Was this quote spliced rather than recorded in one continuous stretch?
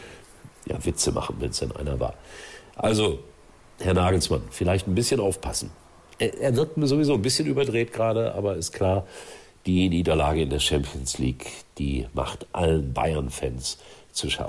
no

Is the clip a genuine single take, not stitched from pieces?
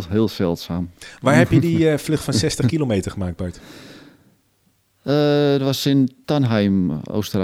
yes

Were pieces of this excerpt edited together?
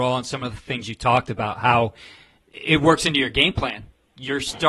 no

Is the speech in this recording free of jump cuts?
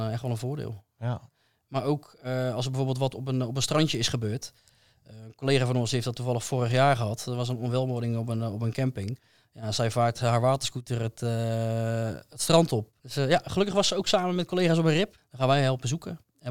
no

